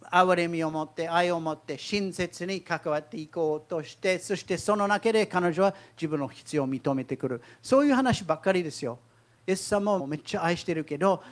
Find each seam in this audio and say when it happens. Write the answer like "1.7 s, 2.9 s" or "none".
10.0 s